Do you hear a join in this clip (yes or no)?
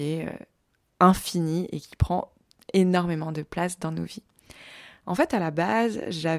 yes